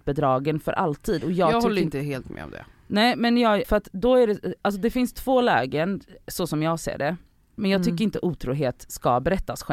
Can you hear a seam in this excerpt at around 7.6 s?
yes; 2 cuts; at 3.6 s, 7.6 s

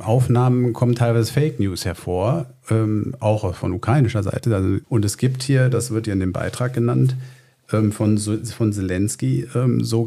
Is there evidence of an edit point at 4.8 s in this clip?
yes; 1 cut; at 4.8 s

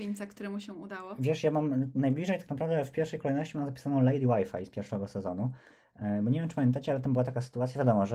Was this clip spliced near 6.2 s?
no; 0 cuts

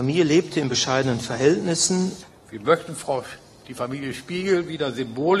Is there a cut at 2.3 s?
yes; 1 cut; at 2.3 s

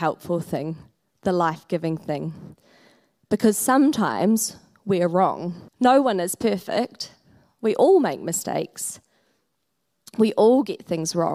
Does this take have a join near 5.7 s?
yes; 1 cut; at 5.7 s

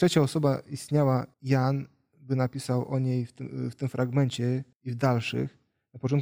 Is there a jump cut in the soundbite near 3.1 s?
no; 2 cuts; at 1.3 s, 4.7 s

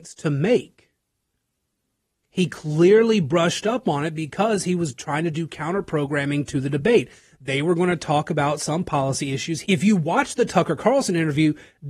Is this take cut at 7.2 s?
no; 1 cut; at 9.6 s

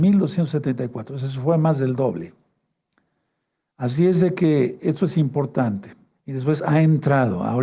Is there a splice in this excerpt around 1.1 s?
no; 1 cut; at 6.2 s

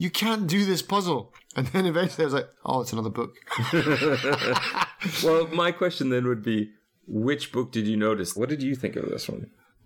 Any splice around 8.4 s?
yes; 1 cut; at 8.4 s

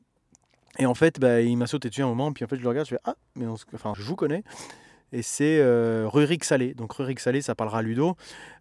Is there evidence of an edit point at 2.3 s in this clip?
no; 1 cut; at 3.9 s

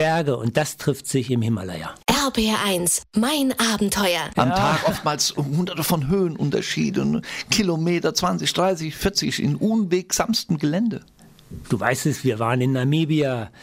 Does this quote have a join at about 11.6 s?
yes; 2 cuts; at 4.3 s, 11.6 s

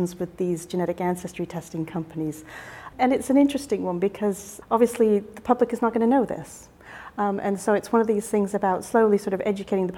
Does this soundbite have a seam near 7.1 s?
no; 1 cut; at 2.9 s

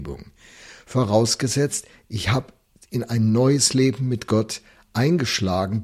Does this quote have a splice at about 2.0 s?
no; 0 cuts

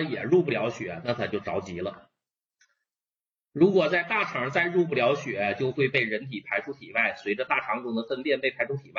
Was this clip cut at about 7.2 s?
no; 0 cuts

